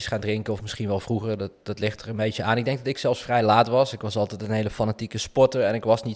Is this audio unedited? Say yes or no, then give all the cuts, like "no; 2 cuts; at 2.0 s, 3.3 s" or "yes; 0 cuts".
yes; 0 cuts